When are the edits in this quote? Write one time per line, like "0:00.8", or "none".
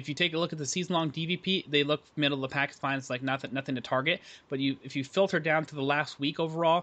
none